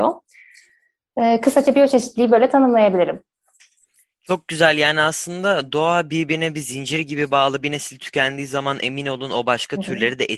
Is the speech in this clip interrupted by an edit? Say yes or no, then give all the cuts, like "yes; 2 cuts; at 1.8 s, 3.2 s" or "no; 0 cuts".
no; 0 cuts